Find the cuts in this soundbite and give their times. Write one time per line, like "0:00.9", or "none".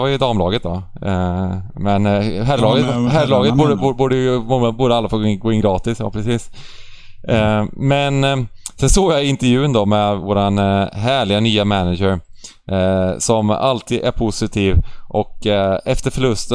none